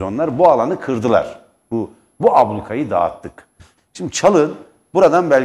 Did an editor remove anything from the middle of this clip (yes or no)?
yes